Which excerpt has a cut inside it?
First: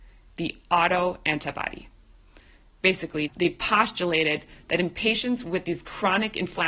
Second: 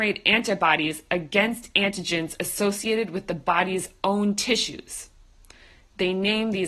first; 1 cut; at 3.3 s

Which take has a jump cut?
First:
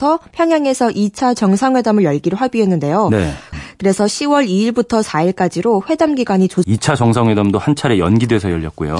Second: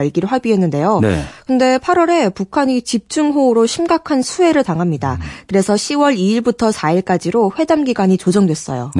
first; 2 cuts; at 3.5 s, 6.6 s

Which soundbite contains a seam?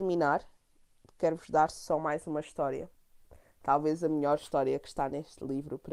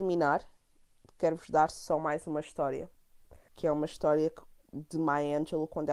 second; 1 cut; at 3.5 s

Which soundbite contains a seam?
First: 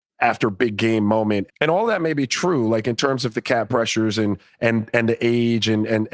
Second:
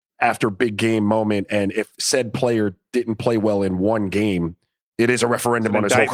first; 1 cut; at 1.5 s

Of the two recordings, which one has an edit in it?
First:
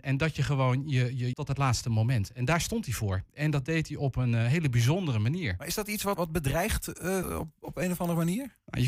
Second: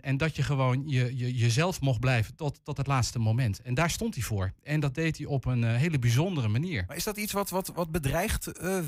first; 3 cuts; at 1.3 s, 6.1 s, 7.2 s

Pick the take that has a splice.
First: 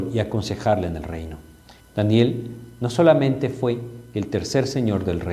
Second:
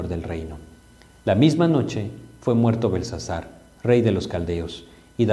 first; 1 cut; at 1.8 s

